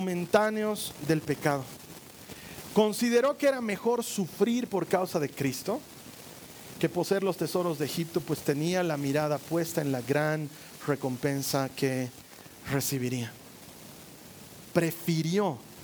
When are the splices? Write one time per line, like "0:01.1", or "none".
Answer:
none